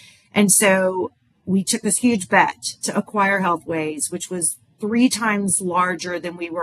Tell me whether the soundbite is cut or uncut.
uncut